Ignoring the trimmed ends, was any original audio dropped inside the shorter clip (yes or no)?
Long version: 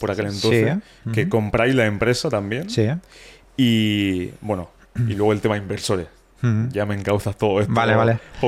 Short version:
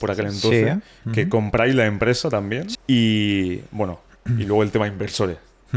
yes